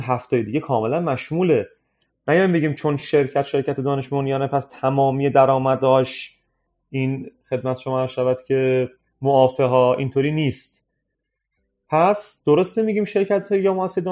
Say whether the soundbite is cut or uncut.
uncut